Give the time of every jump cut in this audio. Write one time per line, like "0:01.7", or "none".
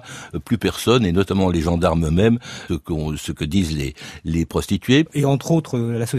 0:02.7
0:05.0